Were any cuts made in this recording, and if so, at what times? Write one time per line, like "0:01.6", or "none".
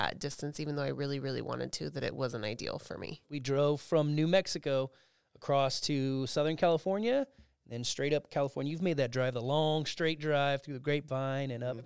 0:03.2